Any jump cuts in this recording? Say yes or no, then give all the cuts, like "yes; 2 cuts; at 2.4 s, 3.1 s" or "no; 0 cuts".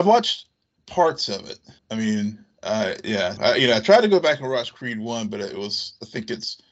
yes; 2 cuts; at 1.8 s, 3.4 s